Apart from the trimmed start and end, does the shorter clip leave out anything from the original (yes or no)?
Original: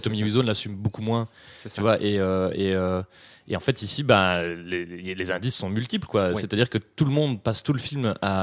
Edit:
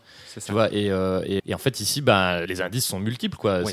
yes